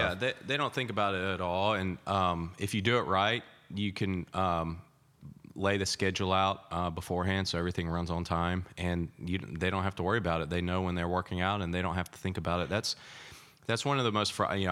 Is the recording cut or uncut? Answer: uncut